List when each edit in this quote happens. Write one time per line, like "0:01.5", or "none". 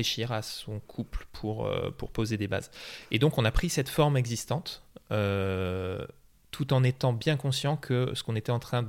none